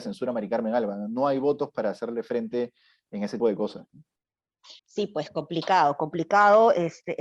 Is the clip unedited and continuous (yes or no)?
no